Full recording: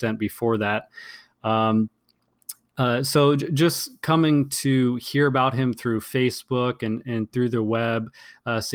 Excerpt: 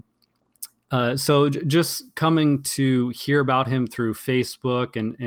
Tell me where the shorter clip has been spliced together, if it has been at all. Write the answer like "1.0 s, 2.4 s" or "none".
none